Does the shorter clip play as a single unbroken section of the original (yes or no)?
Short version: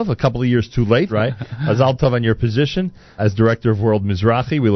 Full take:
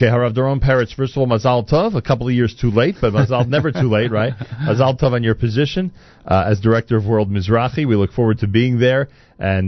no